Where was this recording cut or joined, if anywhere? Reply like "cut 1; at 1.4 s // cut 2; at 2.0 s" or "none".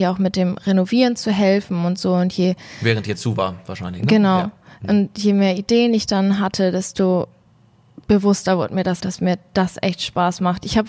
cut 1; at 9.0 s